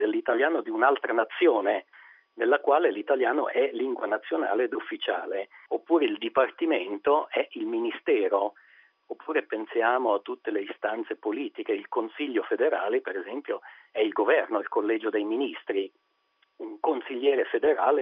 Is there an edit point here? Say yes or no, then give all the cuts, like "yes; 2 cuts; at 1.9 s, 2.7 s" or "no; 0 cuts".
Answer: yes; 2 cuts; at 5.7 s, 9.0 s